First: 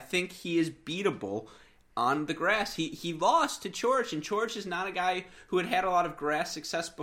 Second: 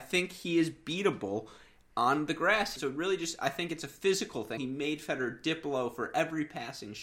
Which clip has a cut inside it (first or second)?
second